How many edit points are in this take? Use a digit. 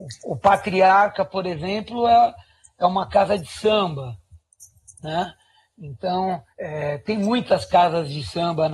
1